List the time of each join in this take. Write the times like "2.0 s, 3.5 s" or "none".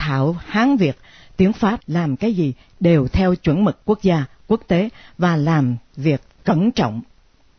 1.8 s